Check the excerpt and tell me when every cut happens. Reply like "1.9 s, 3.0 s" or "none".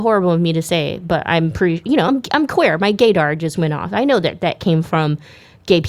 none